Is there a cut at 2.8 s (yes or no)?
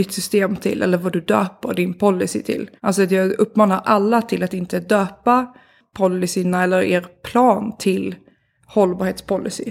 yes